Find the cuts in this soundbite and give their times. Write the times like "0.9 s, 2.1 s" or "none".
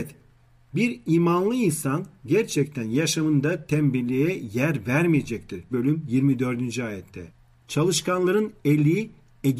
5.7 s

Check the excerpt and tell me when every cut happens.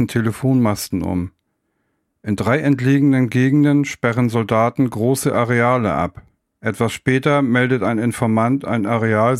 6.5 s

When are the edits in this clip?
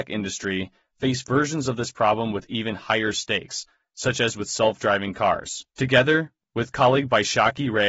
5.7 s

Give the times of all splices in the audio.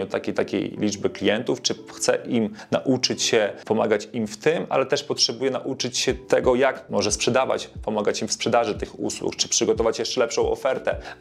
none

